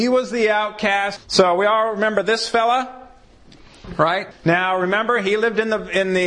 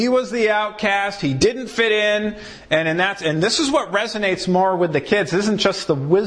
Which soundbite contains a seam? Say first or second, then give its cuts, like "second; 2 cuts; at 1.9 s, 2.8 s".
first; 2 cuts; at 1.2 s, 4.3 s